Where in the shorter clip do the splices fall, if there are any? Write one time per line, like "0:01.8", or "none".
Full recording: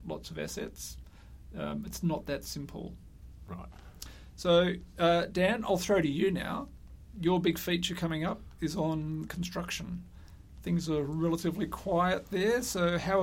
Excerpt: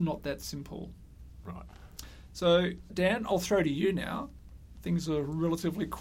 0:02.9
0:04.7